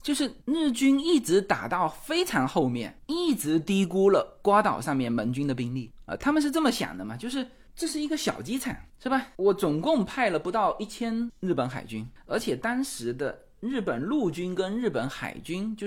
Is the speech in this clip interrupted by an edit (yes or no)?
no